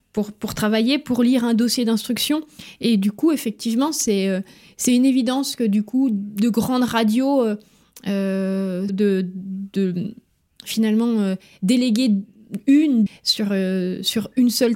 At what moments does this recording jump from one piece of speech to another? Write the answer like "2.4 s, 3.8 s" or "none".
8.9 s, 13.1 s